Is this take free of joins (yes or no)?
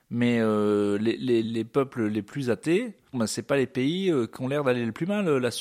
no